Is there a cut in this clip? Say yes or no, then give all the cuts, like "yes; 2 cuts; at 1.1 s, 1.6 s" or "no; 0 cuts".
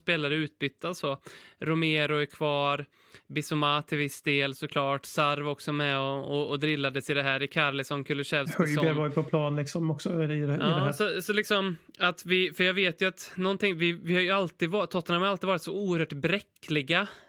no; 0 cuts